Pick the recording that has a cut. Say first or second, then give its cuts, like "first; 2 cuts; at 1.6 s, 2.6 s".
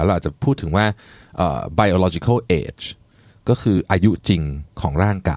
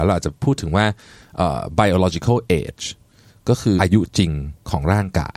second; 1 cut; at 3.8 s